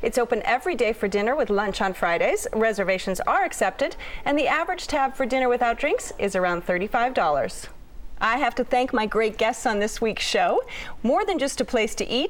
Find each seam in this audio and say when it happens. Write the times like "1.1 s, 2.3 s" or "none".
11.0 s